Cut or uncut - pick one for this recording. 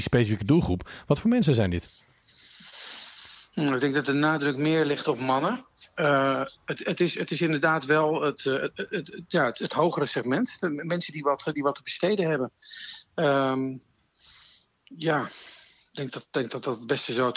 uncut